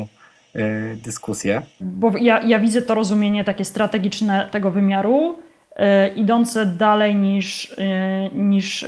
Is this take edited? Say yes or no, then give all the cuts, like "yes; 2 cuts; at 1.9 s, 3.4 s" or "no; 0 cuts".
yes; 1 cut; at 1.8 s